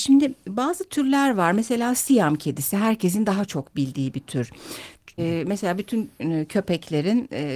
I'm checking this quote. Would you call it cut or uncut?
cut